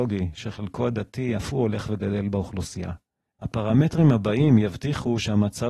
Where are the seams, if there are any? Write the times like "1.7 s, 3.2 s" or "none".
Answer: 3.3 s